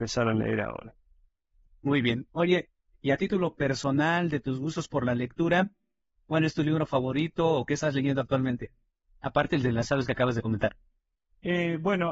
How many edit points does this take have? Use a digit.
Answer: 0